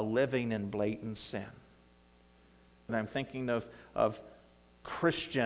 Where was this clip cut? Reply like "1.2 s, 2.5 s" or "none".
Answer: 2.9 s